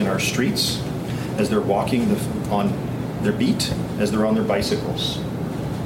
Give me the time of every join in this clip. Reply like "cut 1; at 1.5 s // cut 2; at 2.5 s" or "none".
none